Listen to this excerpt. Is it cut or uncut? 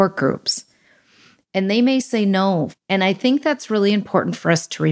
cut